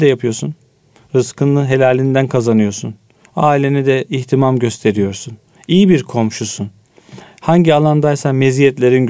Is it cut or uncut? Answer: uncut